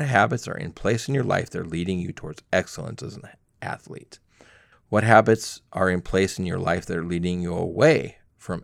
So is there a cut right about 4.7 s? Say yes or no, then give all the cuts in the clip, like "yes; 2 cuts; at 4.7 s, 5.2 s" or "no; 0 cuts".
yes; 1 cut; at 4.7 s